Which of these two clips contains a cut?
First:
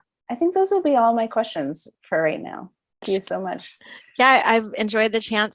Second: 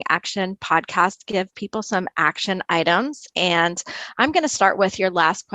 first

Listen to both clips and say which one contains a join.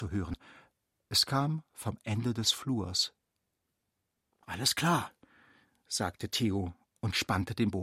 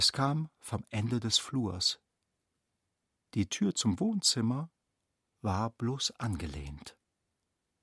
first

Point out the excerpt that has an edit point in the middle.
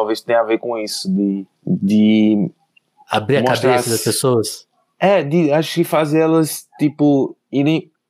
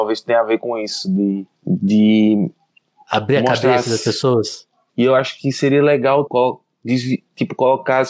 second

